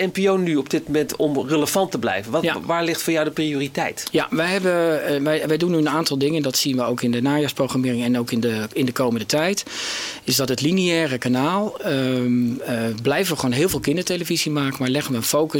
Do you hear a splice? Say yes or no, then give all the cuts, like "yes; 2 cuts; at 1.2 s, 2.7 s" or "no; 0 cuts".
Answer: no; 0 cuts